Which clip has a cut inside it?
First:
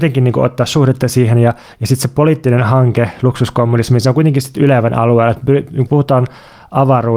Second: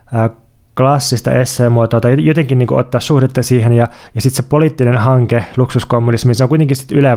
first; 1 cut; at 5.9 s

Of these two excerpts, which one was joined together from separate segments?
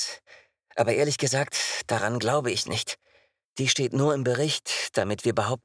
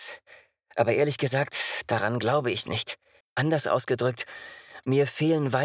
second; 1 cut; at 3.2 s

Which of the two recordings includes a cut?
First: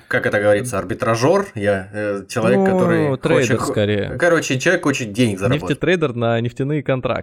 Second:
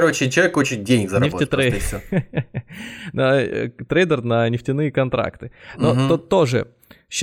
first; 1 cut; at 5.8 s

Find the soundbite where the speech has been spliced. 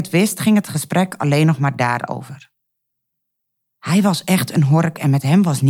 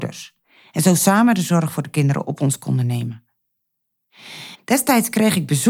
second; 1 cut; at 4.5 s

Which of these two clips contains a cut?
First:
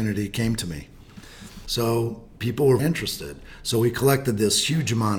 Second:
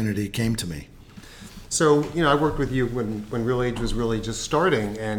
first; 2 cuts; at 1.7 s, 2.8 s

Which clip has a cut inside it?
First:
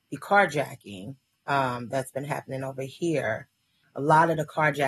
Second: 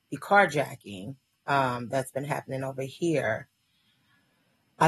first; 1 cut; at 3.8 s

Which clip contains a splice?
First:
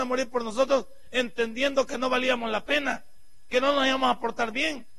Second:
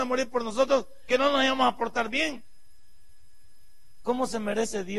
second; 2 cuts; at 1.1 s, 4.0 s

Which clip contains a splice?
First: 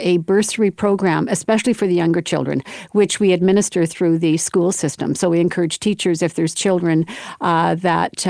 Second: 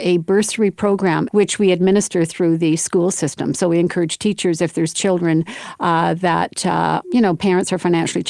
second; 2 cuts; at 1.3 s, 7.0 s

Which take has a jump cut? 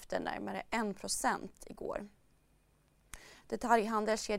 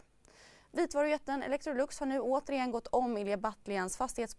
first; 1 cut; at 3.4 s

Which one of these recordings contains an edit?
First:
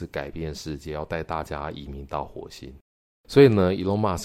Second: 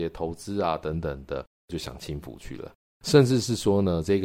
second; 1 cut; at 3.0 s

